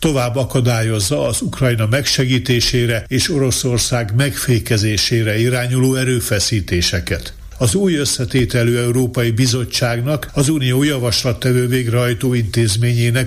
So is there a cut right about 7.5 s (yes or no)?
yes